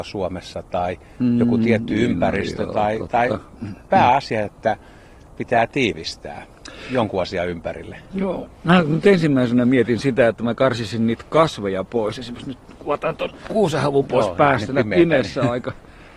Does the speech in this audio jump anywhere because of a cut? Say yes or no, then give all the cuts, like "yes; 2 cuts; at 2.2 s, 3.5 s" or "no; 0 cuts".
no; 0 cuts